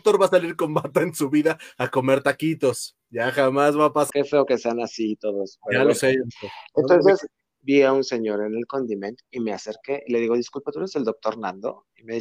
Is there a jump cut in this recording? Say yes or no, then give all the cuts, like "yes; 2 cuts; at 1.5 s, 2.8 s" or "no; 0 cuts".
yes; 2 cuts; at 4.1 s, 7.6 s